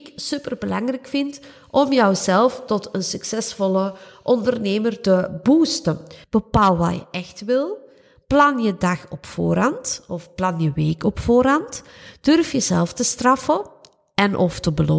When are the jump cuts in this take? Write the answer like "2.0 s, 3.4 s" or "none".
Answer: 6.2 s